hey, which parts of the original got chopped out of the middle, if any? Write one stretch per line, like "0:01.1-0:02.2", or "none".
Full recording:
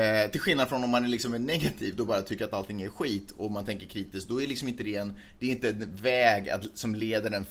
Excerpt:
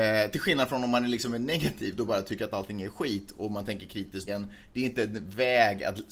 0:04.3-0:04.9